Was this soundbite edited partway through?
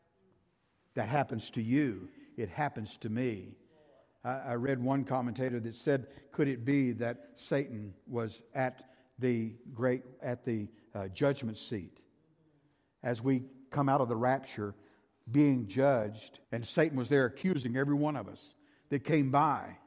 yes; 2 cuts; at 10.2 s, 16.4 s

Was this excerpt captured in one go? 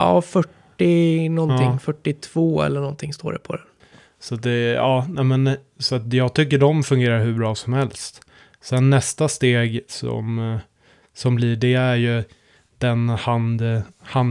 yes; 0 cuts

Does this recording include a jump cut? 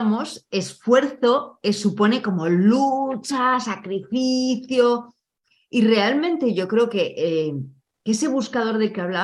no; 0 cuts

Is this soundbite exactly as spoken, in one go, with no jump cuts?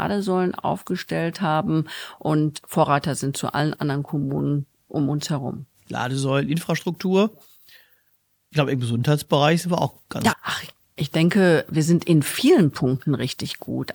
no; 1 cut; at 10.3 s

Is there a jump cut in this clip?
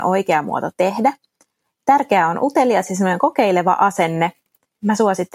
no; 0 cuts

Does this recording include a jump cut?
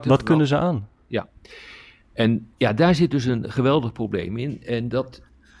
yes; 2 cuts; at 1.1 s, 2.5 s

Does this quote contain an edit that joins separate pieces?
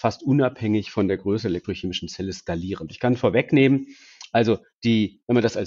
yes; 1 cut; at 2.9 s

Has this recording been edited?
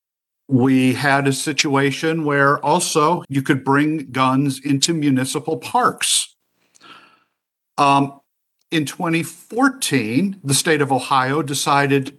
yes; 1 cut; at 3.2 s

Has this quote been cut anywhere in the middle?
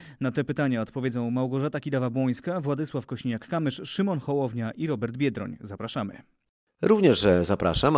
no; 0 cuts

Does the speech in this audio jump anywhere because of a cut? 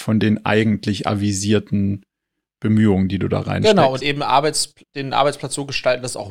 no; 0 cuts

